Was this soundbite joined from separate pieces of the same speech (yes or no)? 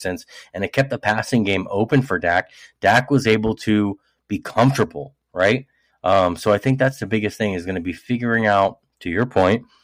no